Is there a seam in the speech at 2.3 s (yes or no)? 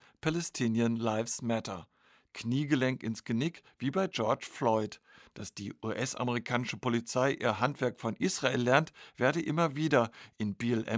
yes